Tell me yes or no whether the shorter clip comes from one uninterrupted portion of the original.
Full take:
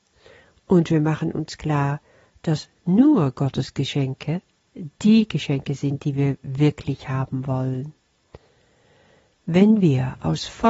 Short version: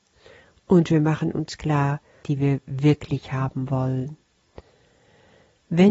no